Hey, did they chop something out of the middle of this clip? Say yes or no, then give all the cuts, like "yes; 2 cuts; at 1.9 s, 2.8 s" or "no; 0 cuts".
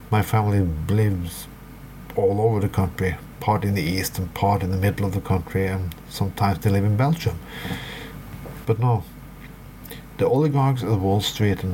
yes; 2 cuts; at 8.6 s, 10.2 s